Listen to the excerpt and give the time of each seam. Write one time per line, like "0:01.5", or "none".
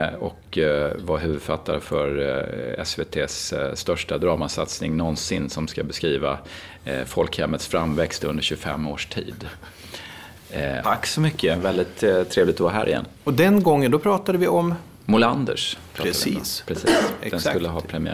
0:10.8